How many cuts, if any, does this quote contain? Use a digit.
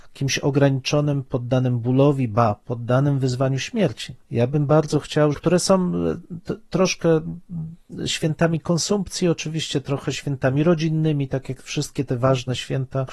2